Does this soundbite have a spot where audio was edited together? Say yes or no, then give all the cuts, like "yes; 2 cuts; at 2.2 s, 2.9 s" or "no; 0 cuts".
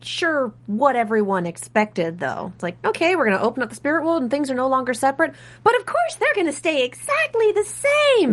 no; 0 cuts